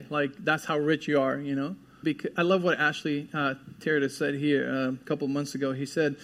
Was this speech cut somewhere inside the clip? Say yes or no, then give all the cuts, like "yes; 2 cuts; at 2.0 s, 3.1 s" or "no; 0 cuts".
yes; 1 cut; at 2.0 s